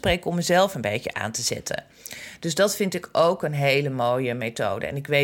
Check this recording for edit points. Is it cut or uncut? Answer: uncut